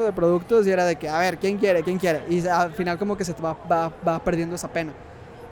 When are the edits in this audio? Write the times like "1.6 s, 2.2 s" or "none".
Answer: none